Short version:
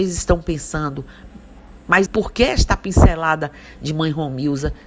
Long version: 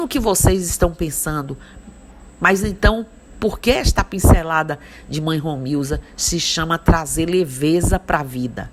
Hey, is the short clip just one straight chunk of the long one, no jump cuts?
no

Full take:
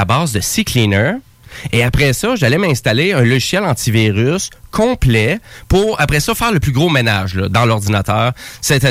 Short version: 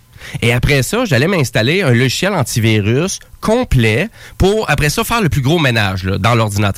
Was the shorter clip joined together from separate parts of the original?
no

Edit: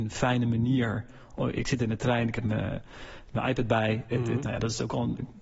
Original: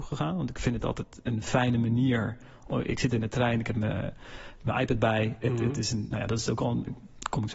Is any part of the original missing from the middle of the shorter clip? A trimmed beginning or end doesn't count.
yes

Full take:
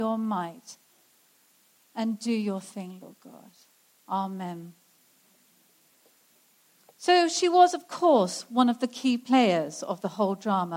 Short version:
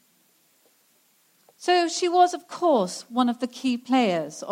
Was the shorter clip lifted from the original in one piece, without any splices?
yes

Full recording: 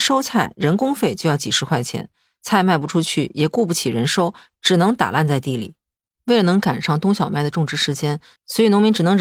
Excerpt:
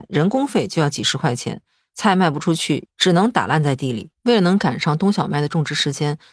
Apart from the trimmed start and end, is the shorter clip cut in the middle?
yes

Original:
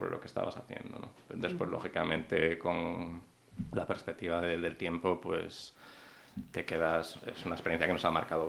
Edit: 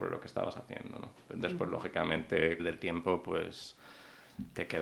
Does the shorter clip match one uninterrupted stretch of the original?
no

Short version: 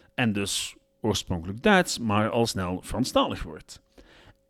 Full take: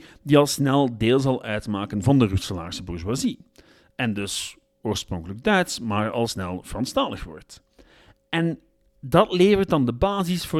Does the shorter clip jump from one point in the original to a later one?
no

